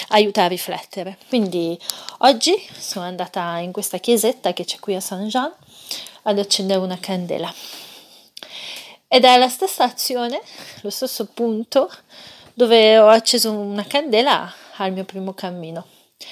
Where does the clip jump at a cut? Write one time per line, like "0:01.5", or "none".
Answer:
none